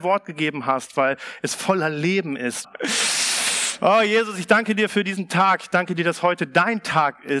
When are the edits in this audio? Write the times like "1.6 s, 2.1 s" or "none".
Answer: 2.6 s